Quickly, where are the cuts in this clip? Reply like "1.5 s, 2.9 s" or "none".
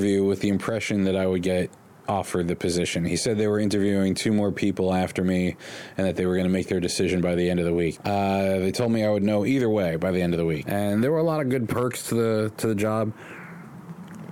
8.0 s, 10.6 s